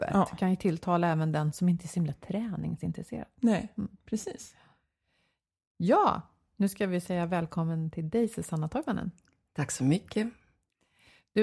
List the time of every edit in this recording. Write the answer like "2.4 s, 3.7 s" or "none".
none